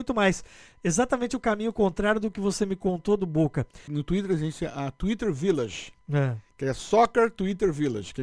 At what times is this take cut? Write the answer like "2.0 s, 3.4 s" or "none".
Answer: 3.9 s